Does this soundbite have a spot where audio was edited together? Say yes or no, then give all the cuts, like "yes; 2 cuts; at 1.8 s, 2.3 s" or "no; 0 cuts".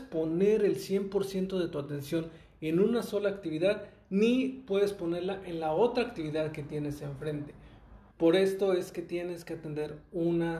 yes; 1 cut; at 8.1 s